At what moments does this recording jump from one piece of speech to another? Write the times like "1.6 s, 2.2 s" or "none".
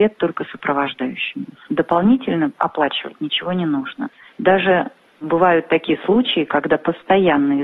1.7 s